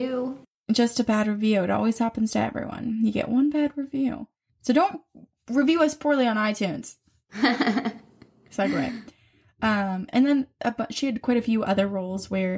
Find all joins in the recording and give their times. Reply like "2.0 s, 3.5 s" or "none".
none